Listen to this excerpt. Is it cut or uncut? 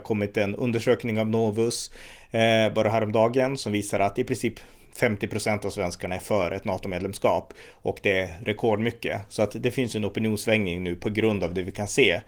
uncut